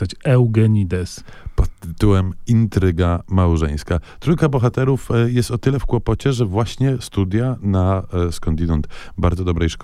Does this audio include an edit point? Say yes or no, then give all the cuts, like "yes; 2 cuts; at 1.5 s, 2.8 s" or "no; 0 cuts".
no; 0 cuts